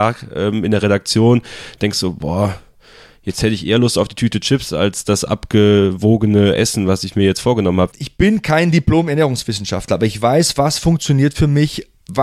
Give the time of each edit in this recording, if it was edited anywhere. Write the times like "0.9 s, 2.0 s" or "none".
7.9 s